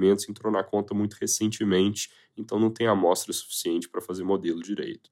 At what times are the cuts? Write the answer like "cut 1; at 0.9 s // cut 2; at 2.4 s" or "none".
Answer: none